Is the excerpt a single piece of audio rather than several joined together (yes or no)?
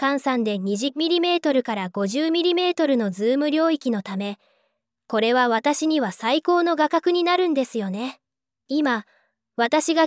no